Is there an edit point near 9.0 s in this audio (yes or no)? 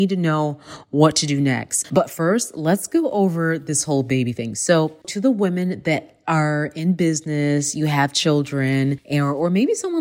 no